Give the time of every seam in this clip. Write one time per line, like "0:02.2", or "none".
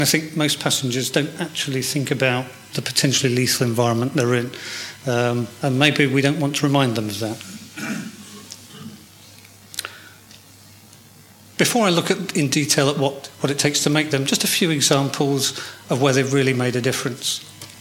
none